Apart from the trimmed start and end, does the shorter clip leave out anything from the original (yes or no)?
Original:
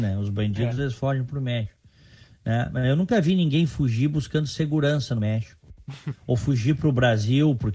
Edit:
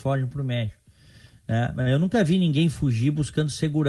no